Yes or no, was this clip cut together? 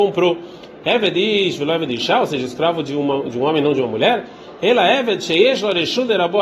no